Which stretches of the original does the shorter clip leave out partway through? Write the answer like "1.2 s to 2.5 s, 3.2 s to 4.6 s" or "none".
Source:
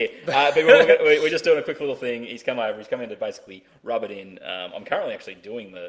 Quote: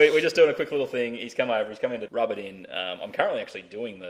3.2 s to 3.8 s